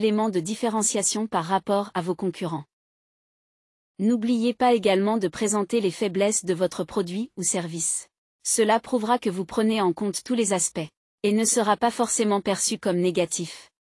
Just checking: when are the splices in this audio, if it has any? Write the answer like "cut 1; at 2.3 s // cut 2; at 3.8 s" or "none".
none